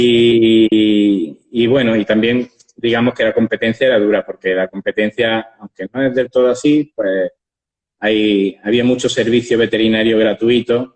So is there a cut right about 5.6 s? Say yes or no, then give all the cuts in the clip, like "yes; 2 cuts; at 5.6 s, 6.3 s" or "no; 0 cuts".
no; 0 cuts